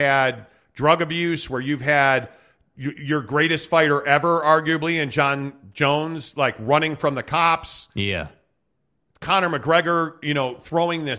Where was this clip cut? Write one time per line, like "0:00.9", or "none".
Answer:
none

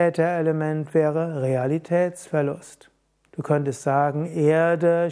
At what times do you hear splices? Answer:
0:03.3

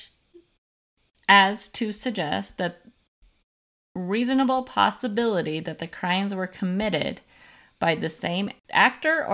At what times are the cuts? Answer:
none

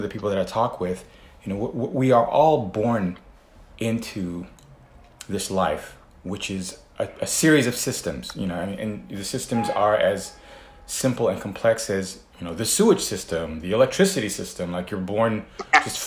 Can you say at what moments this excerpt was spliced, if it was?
none

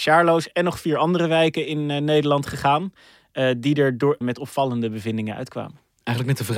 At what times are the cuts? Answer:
0:04.2

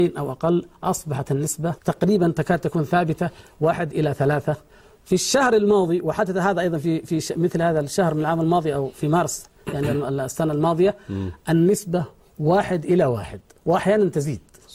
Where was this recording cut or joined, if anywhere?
0:01.8

